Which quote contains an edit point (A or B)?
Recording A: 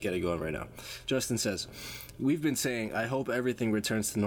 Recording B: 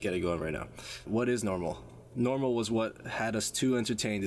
B